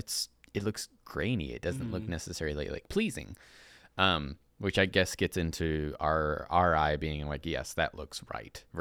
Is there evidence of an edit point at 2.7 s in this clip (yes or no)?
no